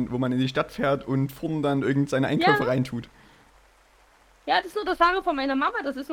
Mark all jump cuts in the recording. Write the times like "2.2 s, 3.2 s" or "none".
none